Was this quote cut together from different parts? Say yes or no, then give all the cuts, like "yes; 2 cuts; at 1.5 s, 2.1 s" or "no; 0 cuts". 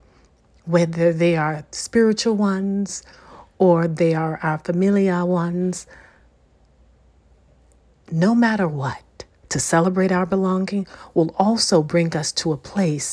yes; 1 cut; at 9.4 s